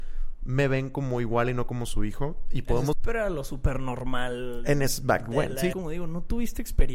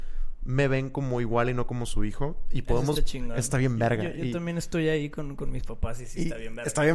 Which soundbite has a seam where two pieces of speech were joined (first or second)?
first